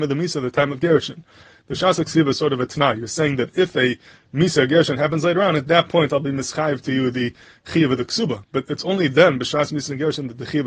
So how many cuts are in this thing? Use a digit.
0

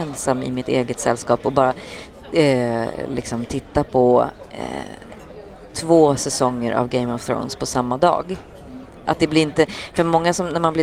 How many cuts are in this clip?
1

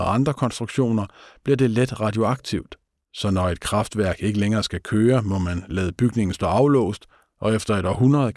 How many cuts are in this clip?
1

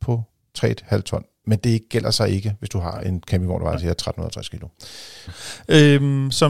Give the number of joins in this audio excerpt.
2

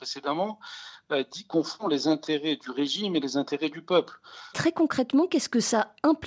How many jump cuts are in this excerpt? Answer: 1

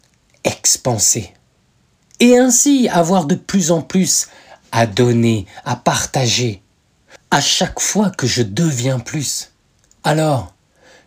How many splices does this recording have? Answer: 1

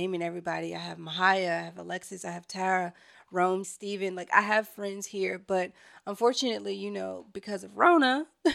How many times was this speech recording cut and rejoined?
1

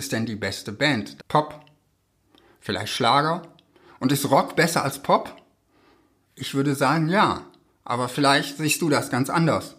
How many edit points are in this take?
1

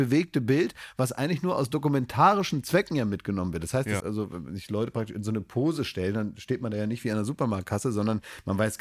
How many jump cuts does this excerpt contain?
1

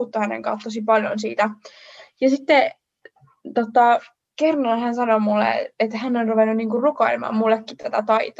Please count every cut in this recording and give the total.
0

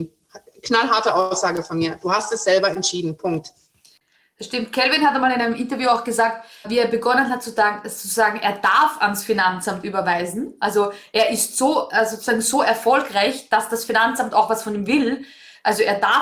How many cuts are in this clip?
1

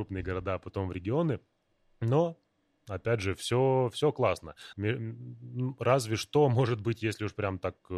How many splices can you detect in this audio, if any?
1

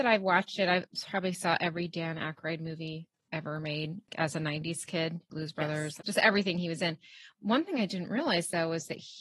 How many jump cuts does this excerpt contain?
0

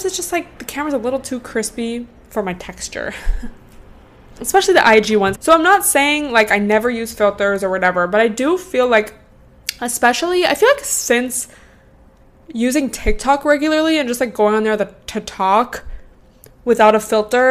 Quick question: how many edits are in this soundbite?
1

